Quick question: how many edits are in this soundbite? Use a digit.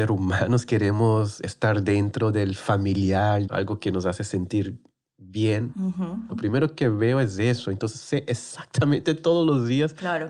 2